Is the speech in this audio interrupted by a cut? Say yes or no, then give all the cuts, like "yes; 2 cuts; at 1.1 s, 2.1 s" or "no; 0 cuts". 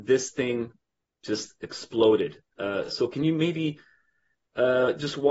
no; 0 cuts